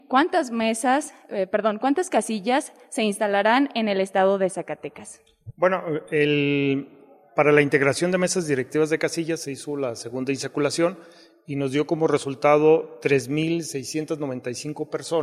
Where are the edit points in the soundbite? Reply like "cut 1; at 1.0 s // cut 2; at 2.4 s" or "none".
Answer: none